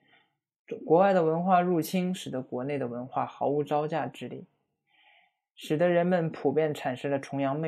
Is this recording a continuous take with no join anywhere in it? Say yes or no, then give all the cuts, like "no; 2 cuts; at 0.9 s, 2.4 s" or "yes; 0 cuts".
yes; 0 cuts